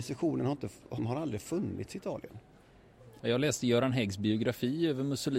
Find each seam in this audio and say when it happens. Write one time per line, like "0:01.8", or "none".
0:01.0
0:03.2